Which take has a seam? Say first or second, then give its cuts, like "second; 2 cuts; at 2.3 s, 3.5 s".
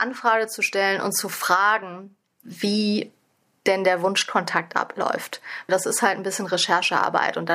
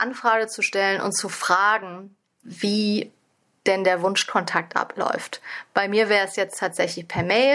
first; 1 cut; at 5.7 s